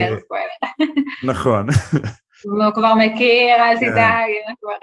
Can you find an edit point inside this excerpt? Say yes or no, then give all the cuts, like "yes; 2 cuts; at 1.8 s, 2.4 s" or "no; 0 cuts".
yes; 1 cut; at 2.4 s